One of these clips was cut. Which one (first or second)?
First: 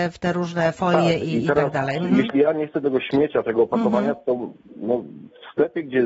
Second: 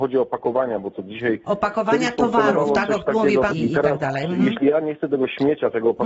second